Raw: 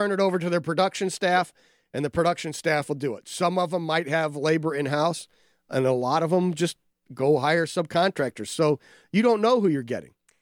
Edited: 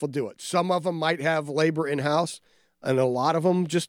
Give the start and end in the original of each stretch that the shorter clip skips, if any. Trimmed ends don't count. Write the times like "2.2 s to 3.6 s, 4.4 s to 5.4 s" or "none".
none